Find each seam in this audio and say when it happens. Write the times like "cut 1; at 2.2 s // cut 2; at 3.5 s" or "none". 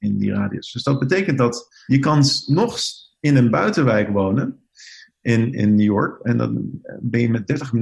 none

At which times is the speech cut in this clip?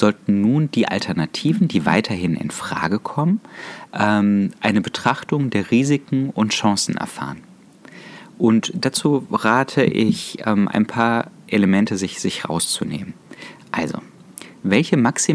none

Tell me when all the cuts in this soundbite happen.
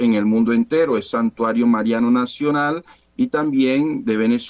none

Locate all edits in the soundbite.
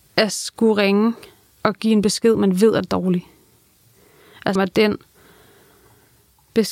cut 1; at 4.6 s

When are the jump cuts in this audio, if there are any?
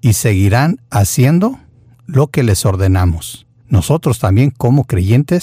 cut 1; at 3.6 s

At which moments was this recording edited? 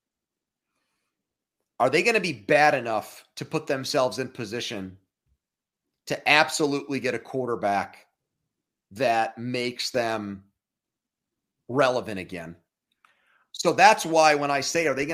cut 1; at 13.5 s

